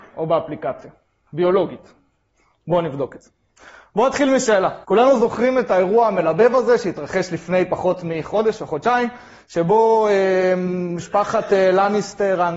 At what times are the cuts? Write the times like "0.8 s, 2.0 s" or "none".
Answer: 4.8 s

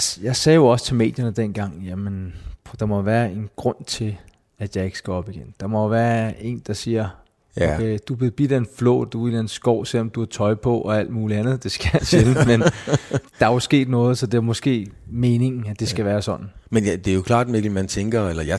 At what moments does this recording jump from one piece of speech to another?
13.2 s

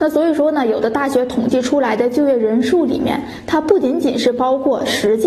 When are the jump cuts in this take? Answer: none

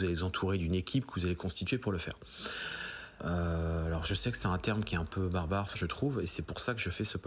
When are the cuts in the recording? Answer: 3.2 s, 5.7 s

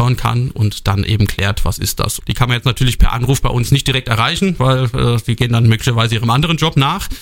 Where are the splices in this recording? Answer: 2.2 s

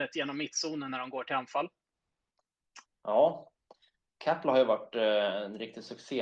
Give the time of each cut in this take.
2.9 s

